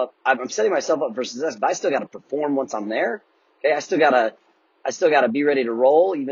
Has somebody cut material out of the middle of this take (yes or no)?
no